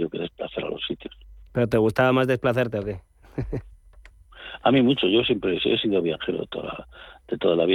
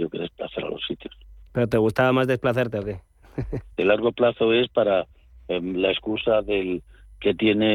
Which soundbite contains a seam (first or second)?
second